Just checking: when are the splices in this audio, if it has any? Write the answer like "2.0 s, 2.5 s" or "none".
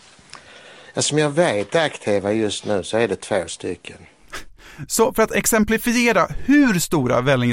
none